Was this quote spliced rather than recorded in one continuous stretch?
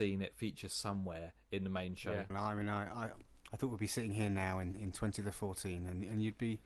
yes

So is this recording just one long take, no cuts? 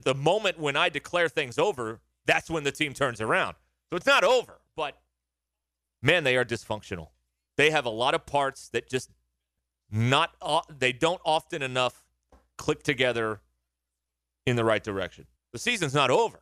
no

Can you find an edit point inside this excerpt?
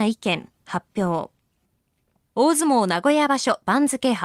no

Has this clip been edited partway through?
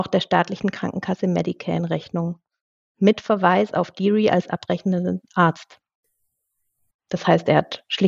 yes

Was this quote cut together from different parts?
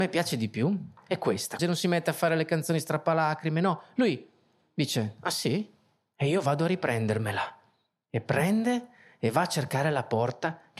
yes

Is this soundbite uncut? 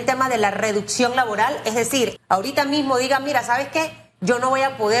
no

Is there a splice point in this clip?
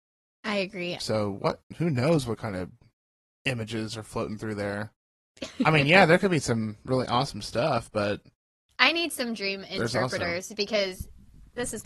yes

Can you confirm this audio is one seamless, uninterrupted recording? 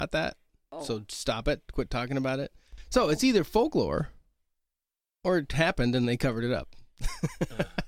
yes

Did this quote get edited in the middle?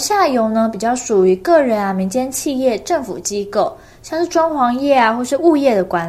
no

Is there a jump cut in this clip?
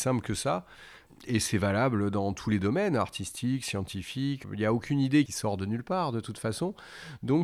no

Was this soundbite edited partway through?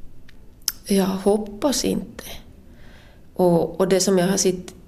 no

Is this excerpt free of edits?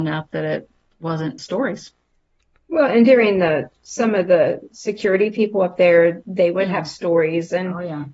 no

